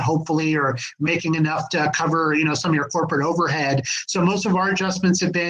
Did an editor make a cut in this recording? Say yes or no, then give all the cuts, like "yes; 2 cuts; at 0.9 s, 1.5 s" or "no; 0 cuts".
no; 0 cuts